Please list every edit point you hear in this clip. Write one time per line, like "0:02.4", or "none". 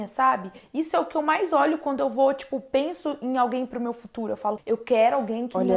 0:04.6